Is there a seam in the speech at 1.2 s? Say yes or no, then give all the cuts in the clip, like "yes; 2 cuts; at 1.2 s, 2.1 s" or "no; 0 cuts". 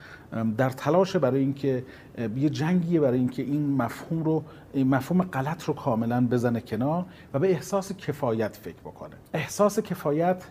no; 1 cut; at 9.2 s